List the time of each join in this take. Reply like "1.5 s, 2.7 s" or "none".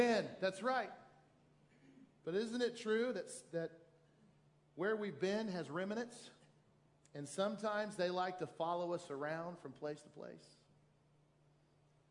none